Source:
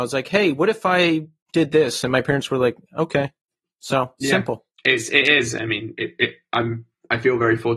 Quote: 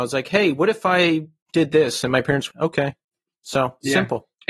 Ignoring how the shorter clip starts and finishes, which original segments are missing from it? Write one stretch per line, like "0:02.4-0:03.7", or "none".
0:02.5-0:02.9

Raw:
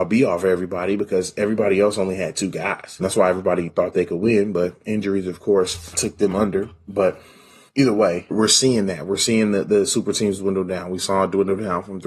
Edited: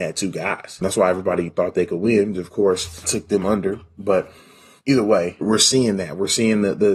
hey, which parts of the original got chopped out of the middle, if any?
0:04.5-0:05.2

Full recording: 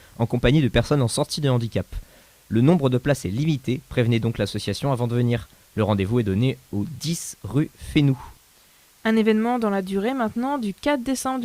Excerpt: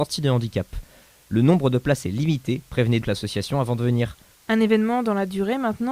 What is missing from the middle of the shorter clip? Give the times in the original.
0:04.2-0:04.3
0:05.7-0:08.9

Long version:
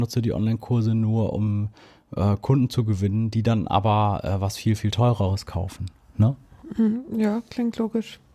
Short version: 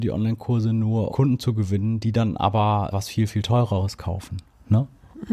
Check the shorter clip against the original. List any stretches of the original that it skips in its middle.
0:01.3-0:02.4
0:04.2-0:04.4

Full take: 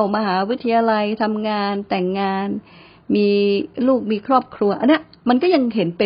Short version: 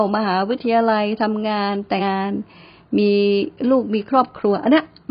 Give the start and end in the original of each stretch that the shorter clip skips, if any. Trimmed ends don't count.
0:02.0-0:02.2

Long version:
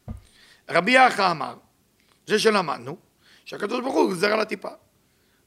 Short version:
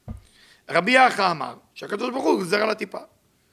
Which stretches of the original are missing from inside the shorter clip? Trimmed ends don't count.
0:01.7-0:03.4

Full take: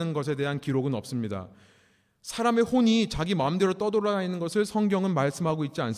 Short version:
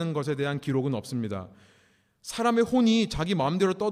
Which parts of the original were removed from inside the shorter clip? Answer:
none

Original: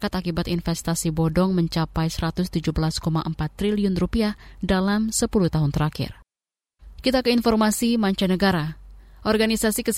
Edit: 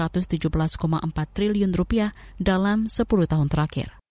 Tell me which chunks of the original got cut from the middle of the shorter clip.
none

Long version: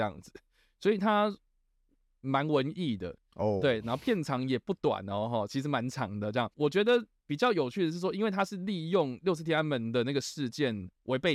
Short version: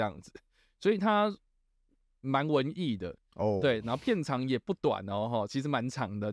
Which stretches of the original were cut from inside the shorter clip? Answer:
none

